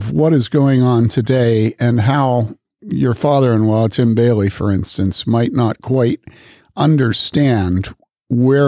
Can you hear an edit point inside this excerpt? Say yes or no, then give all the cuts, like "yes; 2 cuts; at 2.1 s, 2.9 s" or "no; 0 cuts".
no; 0 cuts